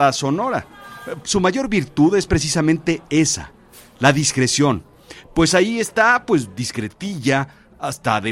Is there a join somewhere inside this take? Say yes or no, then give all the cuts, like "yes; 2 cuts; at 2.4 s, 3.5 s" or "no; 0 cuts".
yes; 1 cut; at 1.2 s